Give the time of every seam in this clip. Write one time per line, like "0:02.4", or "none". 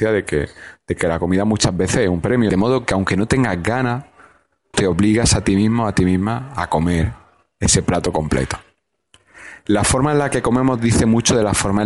0:02.5
0:04.7